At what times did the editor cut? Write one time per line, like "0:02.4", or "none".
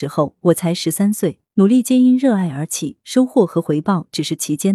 0:01.5

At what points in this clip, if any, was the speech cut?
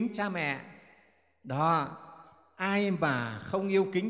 none

